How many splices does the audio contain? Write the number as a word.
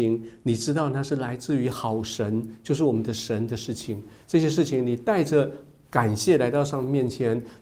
zero